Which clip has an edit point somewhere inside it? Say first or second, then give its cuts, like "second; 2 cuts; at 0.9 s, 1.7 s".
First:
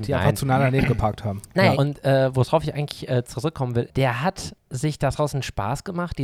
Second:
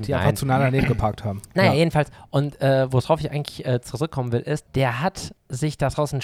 first; 2 cuts; at 1.7 s, 3.9 s